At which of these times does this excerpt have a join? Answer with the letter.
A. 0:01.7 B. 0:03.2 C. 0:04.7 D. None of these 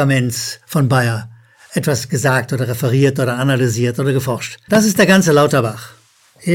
C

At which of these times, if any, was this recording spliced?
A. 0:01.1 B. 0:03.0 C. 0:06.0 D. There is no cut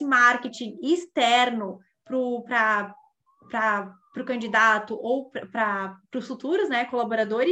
D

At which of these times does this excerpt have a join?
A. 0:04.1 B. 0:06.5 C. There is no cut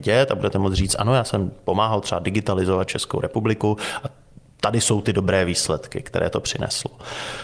C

